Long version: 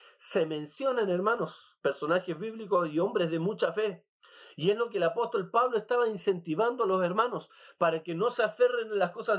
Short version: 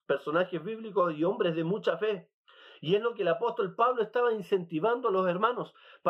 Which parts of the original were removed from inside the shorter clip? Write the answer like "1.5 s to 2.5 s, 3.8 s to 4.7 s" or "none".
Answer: none